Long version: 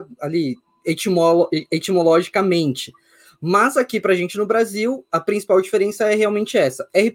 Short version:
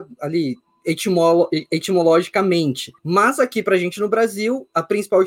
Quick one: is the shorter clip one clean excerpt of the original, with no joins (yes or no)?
no